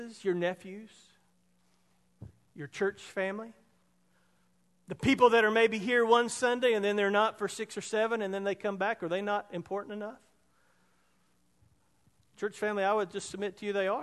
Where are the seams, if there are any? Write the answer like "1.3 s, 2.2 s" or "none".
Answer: none